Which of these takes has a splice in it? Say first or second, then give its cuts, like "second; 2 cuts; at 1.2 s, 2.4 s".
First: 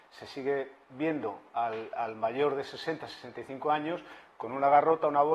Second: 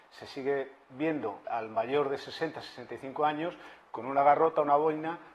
second; 1 cut; at 1.4 s